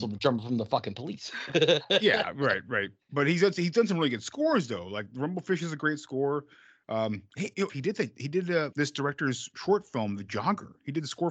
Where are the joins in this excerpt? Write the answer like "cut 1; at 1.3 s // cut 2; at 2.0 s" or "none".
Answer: cut 1; at 7.7 s // cut 2; at 8.7 s